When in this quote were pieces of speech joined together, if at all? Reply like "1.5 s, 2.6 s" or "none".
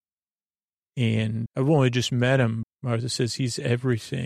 1.5 s, 2.6 s